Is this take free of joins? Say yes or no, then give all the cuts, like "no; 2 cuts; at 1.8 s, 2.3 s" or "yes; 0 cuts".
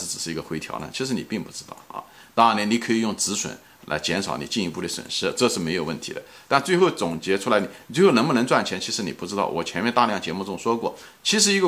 yes; 0 cuts